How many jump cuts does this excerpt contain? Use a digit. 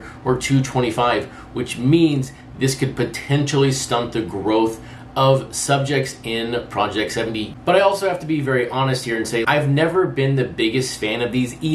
1